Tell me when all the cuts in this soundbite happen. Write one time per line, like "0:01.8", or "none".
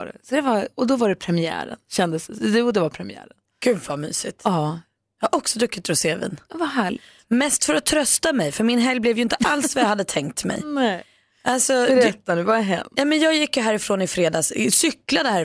none